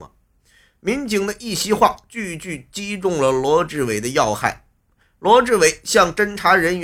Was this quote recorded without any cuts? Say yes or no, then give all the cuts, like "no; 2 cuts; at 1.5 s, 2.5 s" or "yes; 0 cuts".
yes; 0 cuts